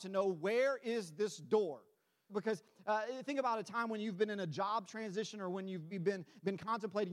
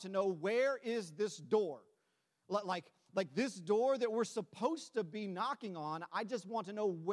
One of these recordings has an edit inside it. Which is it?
first; 2 cuts; at 2.3 s, 5.9 s

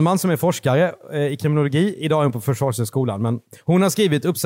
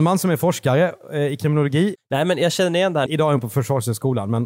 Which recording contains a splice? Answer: second; 2 cuts; at 2.0 s, 3.1 s

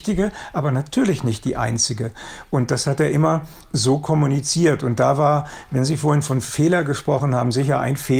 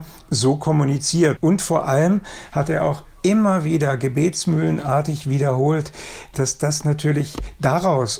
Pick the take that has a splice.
second; 1 cut; at 1.4 s

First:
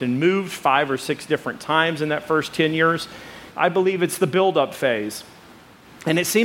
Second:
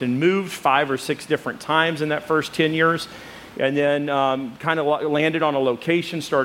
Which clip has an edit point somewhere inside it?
first; 1 cut; at 3.5 s

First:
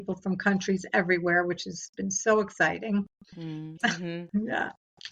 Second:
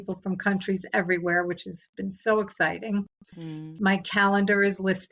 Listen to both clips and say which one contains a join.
first; 1 cut; at 3.8 s

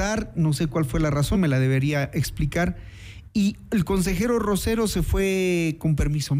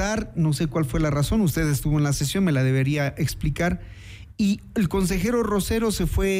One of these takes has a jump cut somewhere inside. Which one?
first; 1 cut; at 1.3 s

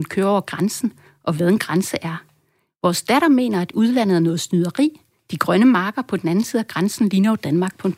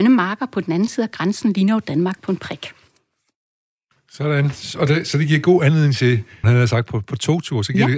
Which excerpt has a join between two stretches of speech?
second; 1 cut; at 6.4 s

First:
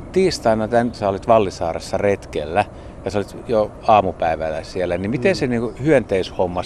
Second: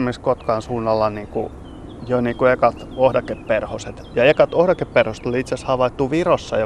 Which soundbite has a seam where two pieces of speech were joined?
first; 1 cut; at 0.9 s

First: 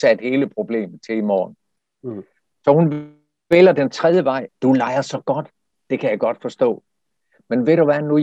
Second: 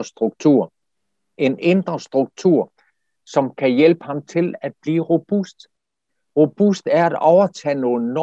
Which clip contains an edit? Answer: first; 2 cuts; at 4.5 s, 5.8 s

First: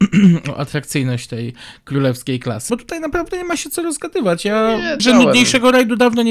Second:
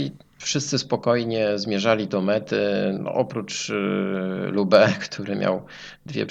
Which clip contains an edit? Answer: first; 2 cuts; at 2.7 s, 5.0 s

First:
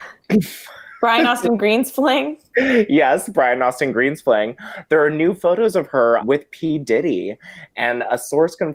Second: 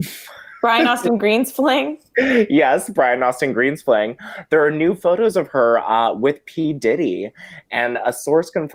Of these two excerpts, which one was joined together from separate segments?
first; 1 cut; at 6.2 s

